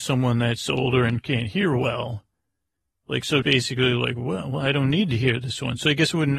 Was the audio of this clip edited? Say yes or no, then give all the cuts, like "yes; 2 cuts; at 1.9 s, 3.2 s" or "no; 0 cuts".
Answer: yes; 1 cut; at 3.4 s